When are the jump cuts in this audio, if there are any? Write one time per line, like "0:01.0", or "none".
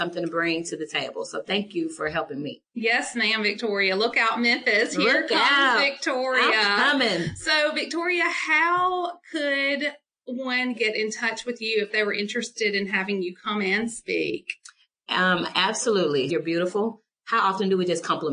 0:16.3